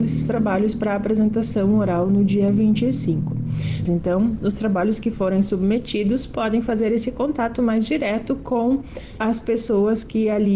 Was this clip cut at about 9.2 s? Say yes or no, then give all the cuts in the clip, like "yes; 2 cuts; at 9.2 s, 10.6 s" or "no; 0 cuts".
yes; 2 cuts; at 3.9 s, 9.2 s